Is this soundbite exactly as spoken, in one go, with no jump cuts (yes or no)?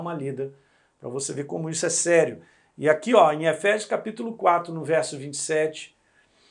yes